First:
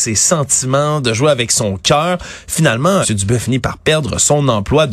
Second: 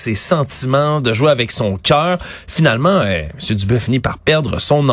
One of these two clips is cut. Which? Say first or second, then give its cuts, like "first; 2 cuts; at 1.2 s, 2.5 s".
first; 1 cut; at 3.0 s